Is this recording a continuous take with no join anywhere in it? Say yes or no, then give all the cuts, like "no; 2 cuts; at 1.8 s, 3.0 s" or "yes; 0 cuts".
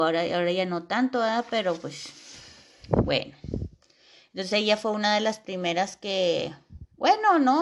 yes; 0 cuts